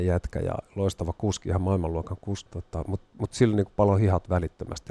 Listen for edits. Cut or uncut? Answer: cut